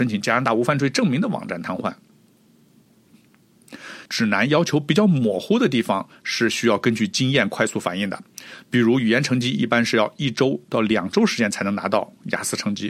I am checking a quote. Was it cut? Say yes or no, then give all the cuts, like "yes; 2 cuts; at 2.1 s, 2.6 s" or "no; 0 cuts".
yes; 1 cut; at 4.1 s